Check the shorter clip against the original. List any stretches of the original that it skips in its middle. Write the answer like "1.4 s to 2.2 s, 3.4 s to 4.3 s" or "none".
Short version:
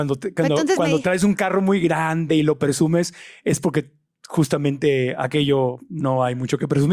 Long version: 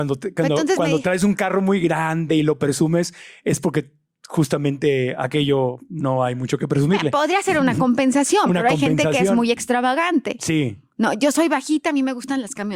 none